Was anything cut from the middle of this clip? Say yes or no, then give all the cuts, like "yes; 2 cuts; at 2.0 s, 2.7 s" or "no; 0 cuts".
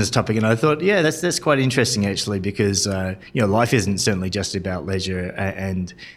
no; 0 cuts